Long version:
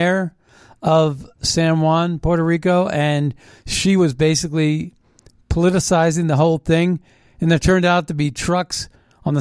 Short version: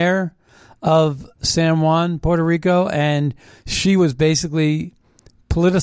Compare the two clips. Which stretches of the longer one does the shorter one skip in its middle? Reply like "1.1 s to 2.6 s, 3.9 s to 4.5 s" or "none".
none